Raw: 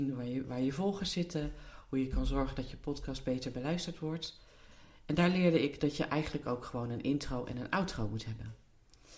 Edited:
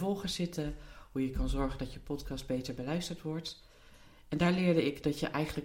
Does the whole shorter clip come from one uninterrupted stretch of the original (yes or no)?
yes